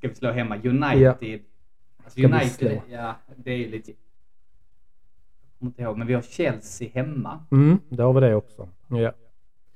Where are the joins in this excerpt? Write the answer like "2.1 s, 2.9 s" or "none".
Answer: 3.9 s, 8.8 s